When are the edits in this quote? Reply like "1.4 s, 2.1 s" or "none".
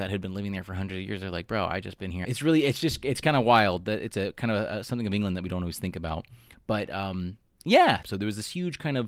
2.2 s, 8.0 s